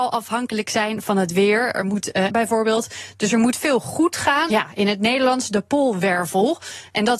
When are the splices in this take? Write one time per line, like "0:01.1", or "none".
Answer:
0:02.3
0:04.5